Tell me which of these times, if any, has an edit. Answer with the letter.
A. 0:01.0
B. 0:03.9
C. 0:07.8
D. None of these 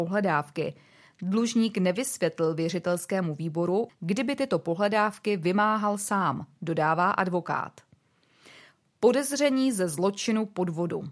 B